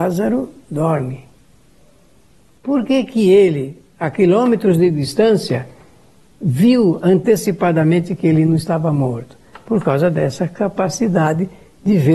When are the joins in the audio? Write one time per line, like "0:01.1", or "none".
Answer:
none